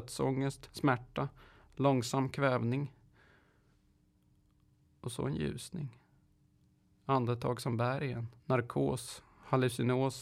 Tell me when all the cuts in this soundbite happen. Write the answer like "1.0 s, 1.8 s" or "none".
6.8 s, 8.4 s

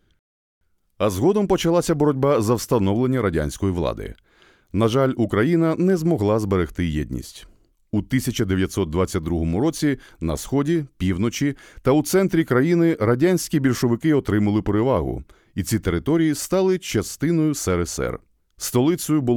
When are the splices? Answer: none

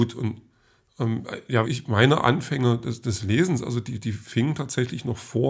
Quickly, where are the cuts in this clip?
1.6 s

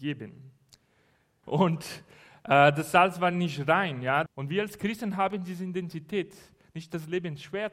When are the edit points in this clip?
1.4 s, 4.3 s

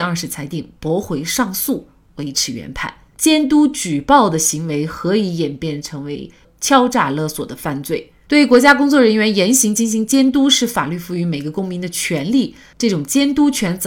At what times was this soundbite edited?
none

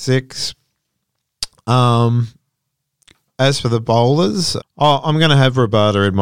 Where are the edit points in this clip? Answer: 4.6 s

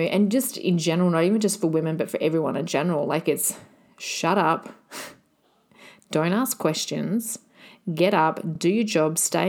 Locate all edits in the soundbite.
none

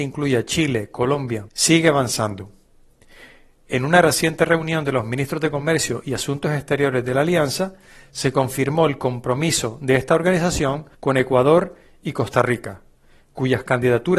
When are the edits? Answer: 1.5 s, 10.9 s

